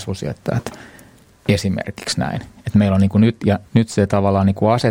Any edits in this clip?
yes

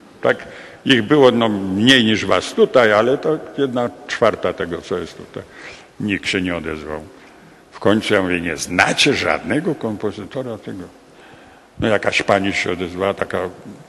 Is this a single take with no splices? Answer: yes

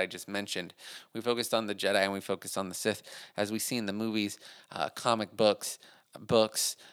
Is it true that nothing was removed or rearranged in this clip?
yes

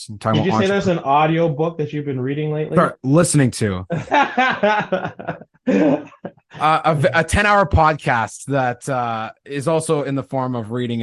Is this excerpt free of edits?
yes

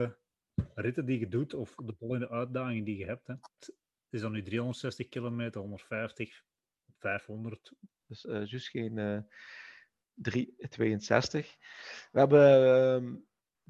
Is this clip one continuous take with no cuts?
no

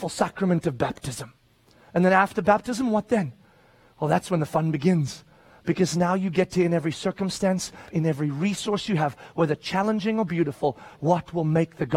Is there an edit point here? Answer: yes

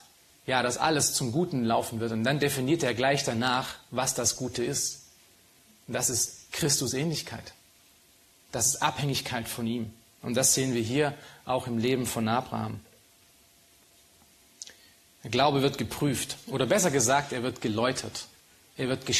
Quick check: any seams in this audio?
no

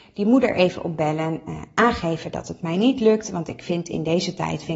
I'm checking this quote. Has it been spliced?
no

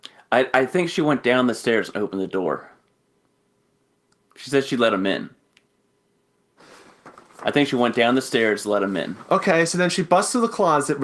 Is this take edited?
no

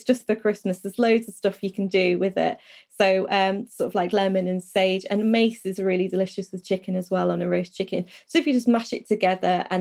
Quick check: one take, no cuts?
yes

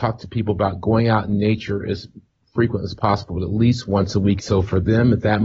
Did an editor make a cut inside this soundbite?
yes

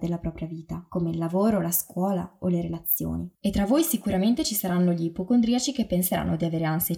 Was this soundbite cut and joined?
no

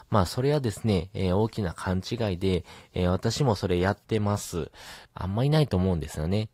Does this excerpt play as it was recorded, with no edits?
no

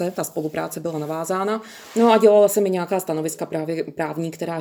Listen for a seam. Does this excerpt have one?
no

